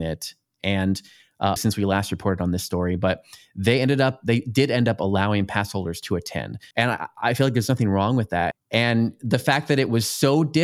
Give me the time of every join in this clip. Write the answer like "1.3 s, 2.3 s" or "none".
1.6 s, 6.7 s, 8.5 s